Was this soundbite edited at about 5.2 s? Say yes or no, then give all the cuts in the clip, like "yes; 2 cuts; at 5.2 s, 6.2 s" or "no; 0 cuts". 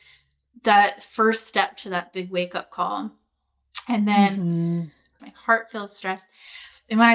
yes; 1 cut; at 5.2 s